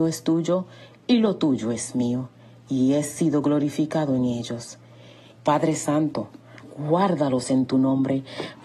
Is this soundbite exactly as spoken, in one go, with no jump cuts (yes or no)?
no